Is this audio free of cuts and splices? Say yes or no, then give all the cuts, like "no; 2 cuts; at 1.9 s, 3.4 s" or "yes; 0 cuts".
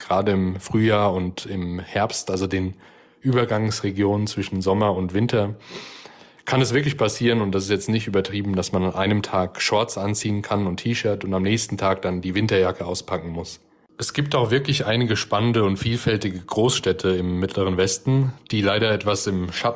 yes; 0 cuts